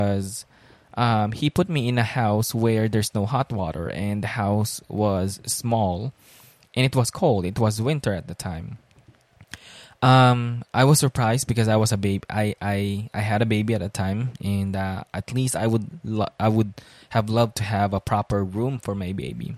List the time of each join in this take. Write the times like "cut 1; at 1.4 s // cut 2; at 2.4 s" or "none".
none